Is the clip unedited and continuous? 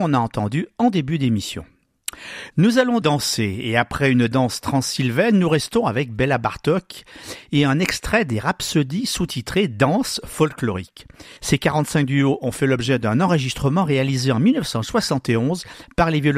no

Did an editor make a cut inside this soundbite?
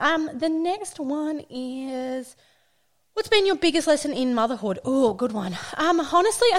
no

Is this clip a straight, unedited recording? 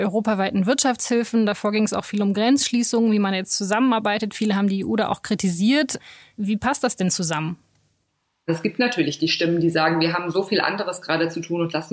yes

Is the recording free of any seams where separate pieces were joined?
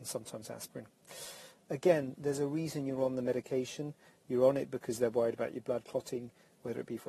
no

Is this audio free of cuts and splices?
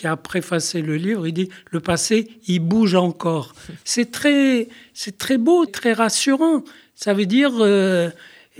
no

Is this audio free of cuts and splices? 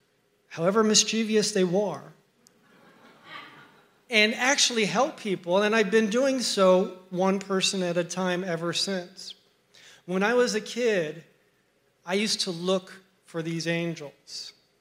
yes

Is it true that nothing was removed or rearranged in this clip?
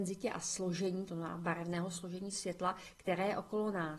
no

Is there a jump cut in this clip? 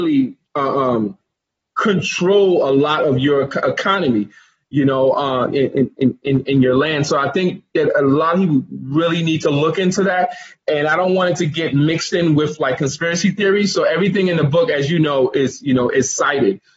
no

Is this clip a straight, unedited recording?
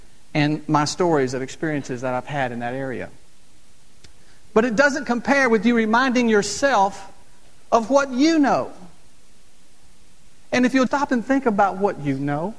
no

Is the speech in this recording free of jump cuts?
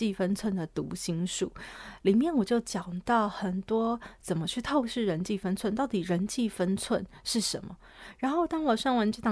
yes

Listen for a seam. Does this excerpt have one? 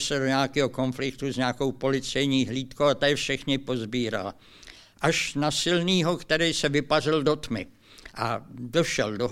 no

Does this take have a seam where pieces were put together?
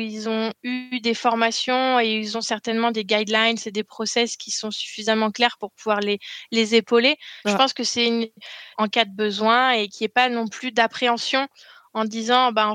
yes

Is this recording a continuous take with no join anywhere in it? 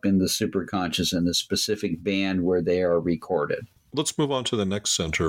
no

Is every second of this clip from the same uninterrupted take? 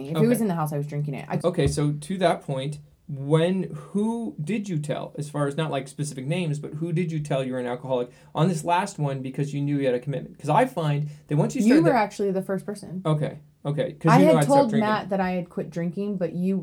no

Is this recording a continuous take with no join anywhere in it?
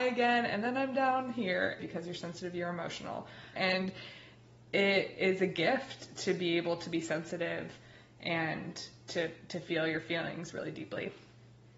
no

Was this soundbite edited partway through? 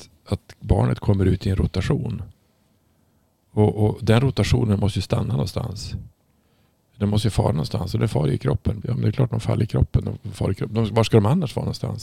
yes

